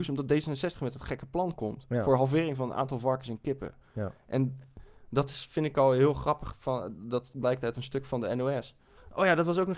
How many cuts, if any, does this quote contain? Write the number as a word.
zero